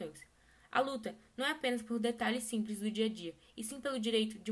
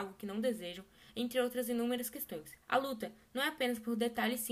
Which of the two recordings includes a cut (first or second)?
second